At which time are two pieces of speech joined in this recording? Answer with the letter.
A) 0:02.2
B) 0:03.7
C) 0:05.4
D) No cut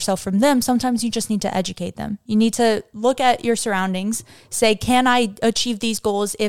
D